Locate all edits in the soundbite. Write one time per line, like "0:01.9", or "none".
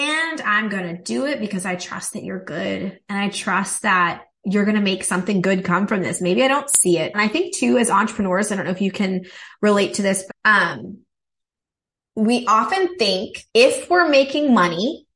0:07.1
0:10.3
0:13.5